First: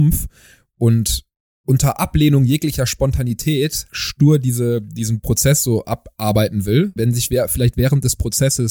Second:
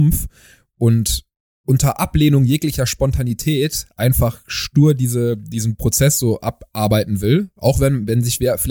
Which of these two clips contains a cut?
first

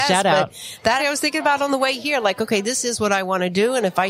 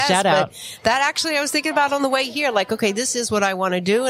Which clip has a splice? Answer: first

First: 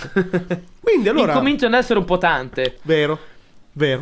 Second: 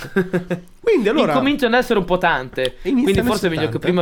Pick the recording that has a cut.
first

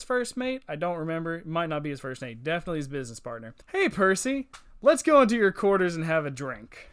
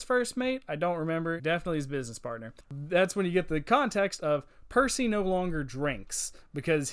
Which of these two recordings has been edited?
second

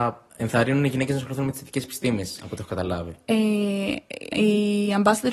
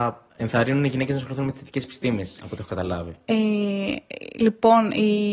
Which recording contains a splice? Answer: first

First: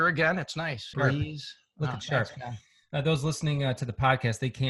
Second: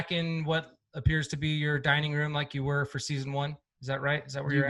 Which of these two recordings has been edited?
first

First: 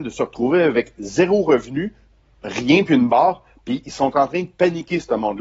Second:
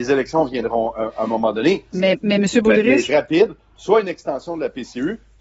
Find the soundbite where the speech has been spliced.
second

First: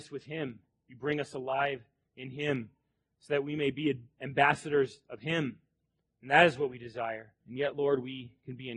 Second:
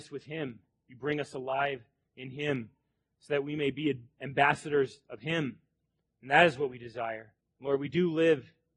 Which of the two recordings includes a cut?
first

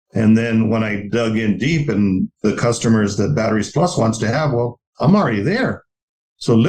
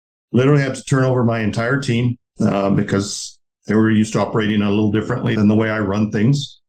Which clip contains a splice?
second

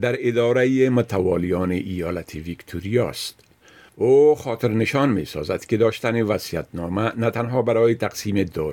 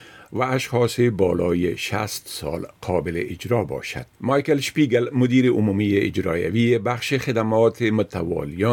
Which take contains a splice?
second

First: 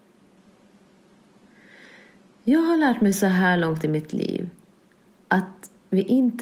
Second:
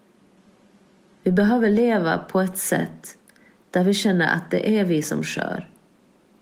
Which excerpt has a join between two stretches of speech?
second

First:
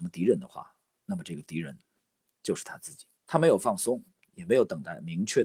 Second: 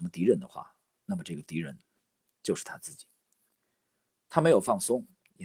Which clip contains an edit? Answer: first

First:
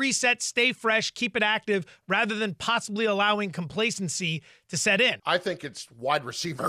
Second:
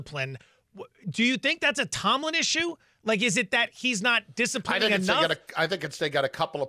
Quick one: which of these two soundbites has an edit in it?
first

